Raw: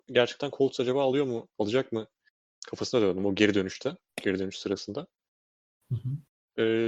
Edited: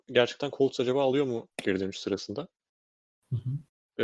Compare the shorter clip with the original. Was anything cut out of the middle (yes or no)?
yes